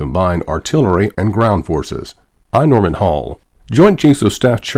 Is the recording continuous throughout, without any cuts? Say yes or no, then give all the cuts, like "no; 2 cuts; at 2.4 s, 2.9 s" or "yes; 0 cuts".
no; 2 cuts; at 1.1 s, 2.3 s